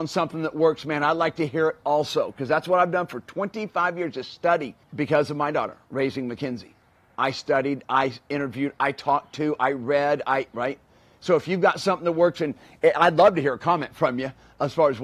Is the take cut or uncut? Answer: cut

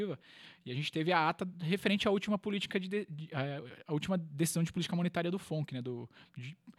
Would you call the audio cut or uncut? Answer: uncut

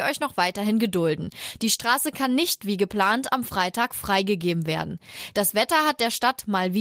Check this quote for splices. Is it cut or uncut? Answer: uncut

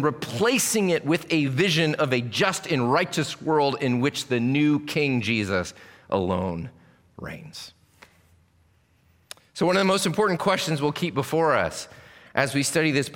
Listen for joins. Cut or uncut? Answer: uncut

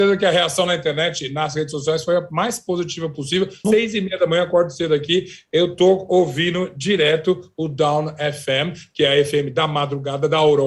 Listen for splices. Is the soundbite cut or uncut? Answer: cut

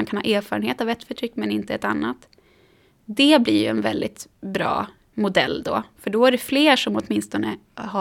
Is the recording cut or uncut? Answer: uncut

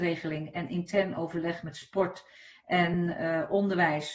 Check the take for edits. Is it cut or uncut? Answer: uncut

